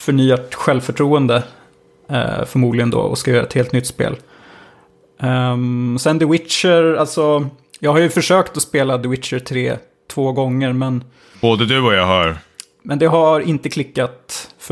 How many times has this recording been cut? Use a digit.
0